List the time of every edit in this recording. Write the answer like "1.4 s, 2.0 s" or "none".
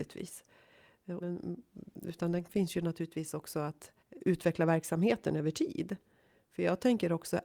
1.2 s, 4.0 s

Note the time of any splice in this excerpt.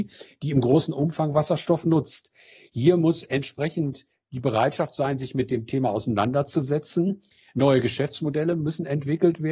none

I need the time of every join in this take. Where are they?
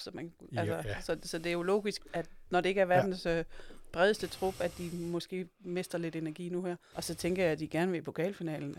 2.0 s, 6.9 s

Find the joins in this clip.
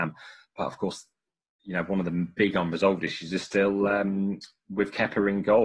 none

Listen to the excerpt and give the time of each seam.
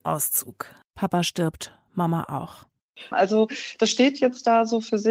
3.1 s

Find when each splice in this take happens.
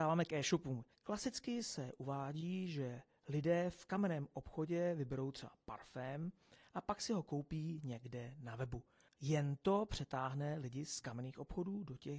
0.9 s, 9.1 s

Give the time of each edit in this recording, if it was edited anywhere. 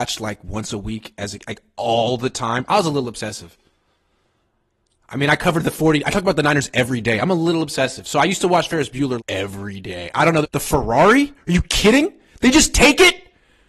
9.2 s, 10.4 s

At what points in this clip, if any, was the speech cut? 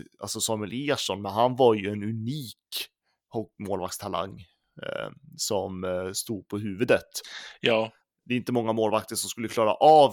none

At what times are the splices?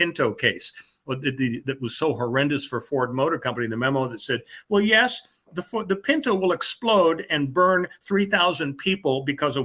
1.6 s

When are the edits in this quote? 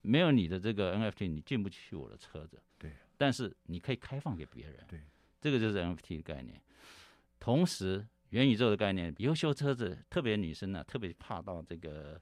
9.1 s

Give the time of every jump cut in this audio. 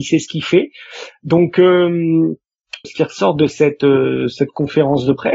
2.8 s

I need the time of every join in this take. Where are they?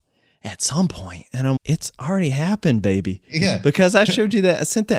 1.6 s

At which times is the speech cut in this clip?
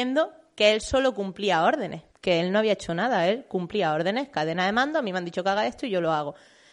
2.1 s

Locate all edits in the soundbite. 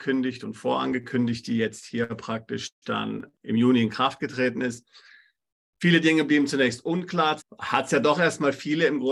3.3 s, 7.4 s

